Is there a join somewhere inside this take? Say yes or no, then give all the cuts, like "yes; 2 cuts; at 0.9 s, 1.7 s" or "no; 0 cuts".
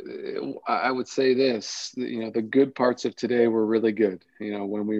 no; 0 cuts